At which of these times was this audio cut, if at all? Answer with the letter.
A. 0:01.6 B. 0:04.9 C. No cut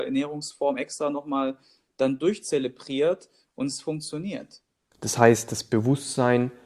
B